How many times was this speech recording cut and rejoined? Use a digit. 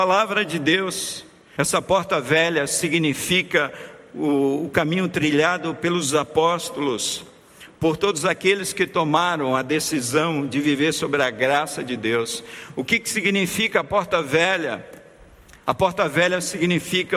1